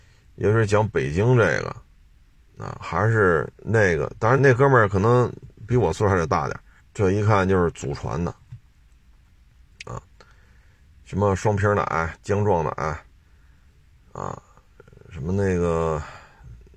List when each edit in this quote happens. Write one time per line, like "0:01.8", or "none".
0:04.4
0:06.8